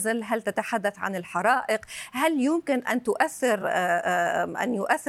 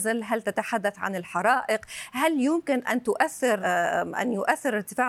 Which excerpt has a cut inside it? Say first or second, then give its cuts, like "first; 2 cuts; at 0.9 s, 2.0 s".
second; 1 cut; at 3.6 s